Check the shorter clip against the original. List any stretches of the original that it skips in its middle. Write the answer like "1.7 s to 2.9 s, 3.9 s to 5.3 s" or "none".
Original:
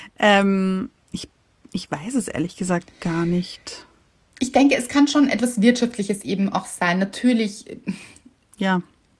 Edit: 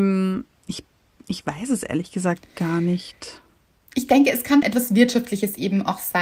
5.1 s to 5.3 s